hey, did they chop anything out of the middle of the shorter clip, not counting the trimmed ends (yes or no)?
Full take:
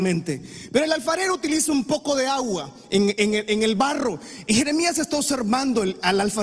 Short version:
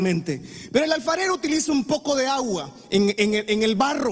no